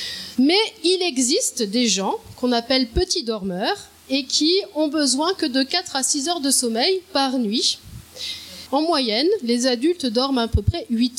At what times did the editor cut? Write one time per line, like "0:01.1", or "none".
0:08.7